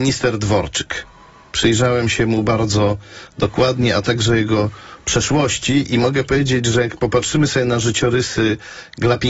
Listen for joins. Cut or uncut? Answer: uncut